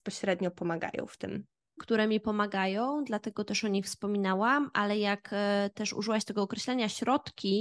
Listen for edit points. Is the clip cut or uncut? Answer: cut